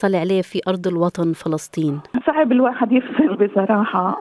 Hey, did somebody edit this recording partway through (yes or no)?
yes